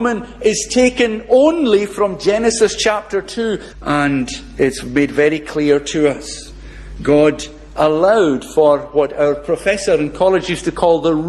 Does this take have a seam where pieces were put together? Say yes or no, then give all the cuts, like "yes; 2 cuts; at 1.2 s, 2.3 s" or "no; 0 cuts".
yes; 1 cut; at 3.7 s